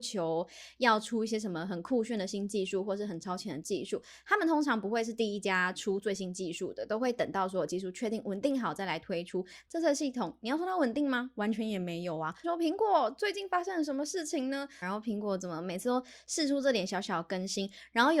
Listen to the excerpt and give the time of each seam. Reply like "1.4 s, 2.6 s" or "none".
12.4 s, 14.8 s

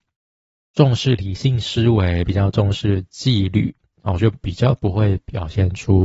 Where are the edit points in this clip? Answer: 2.3 s, 4.2 s

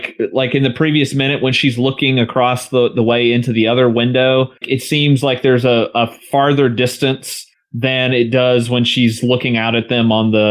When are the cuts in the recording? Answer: 4.6 s

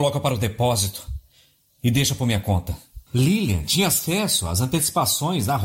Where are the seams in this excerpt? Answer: 3.1 s

